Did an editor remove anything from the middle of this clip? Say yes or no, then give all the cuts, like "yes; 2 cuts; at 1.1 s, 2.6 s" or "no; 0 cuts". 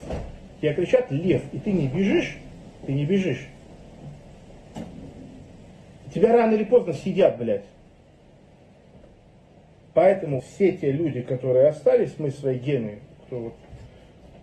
yes; 1 cut; at 10.4 s